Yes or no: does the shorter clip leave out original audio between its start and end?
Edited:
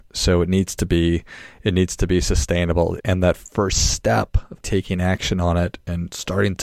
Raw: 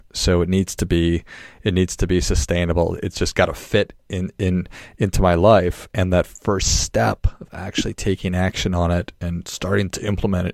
yes